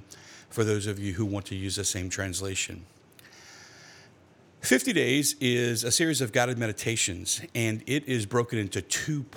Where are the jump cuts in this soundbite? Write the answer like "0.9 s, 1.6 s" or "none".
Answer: none